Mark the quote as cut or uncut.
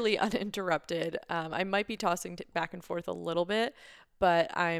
uncut